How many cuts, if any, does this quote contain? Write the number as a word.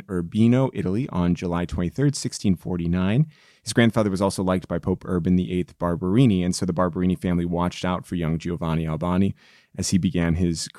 one